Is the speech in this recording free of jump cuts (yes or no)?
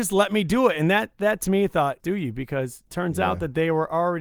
no